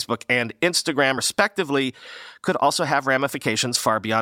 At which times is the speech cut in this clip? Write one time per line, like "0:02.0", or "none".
none